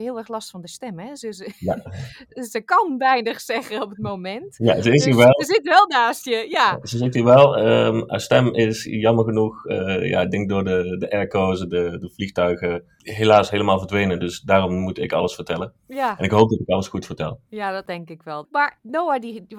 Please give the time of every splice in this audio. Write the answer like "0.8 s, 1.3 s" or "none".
none